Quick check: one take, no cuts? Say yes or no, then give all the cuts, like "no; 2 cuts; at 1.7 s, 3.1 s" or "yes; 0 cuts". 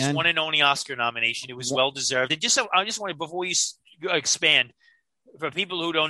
yes; 0 cuts